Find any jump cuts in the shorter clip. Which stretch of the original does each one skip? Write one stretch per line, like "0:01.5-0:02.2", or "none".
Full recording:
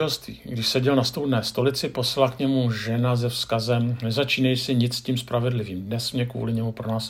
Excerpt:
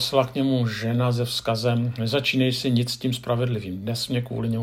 none